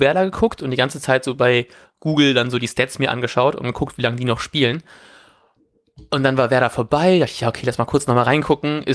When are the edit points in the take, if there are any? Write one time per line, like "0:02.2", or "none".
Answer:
none